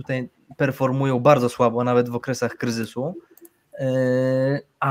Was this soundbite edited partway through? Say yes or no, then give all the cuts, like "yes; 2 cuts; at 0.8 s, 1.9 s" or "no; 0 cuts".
no; 0 cuts